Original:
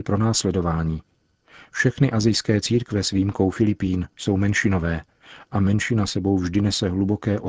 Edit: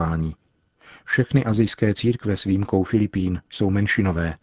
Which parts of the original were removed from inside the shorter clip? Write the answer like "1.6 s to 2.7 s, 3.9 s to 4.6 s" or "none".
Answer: none